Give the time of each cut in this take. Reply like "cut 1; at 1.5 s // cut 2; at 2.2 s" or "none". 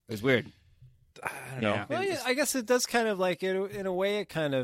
cut 1; at 1.1 s